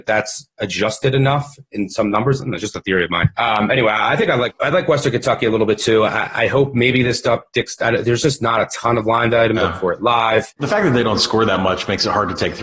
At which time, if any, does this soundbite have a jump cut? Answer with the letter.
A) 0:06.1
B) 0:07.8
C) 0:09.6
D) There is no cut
C